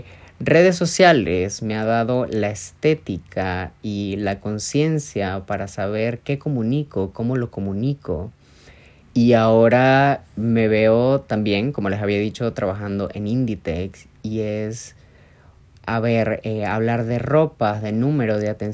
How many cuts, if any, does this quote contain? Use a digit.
1